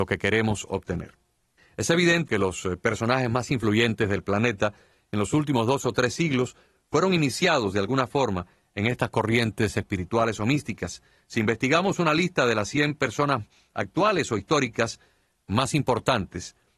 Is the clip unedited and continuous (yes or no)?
no